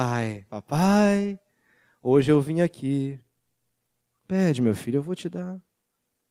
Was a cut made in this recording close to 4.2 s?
yes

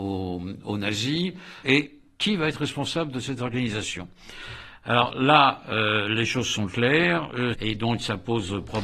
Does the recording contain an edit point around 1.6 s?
yes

